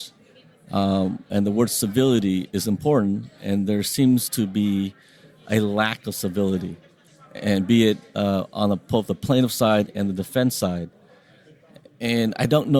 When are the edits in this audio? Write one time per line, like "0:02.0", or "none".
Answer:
none